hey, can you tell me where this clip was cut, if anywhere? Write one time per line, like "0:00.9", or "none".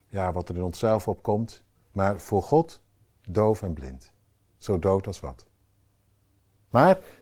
0:01.7